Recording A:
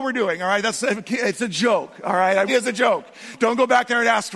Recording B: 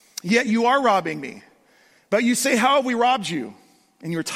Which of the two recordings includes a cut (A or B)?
A